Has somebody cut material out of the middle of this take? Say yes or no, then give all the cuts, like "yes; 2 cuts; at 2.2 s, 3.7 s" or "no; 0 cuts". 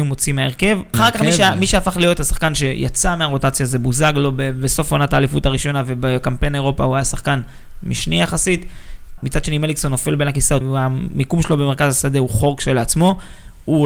yes; 3 cuts; at 0.9 s, 9.2 s, 10.6 s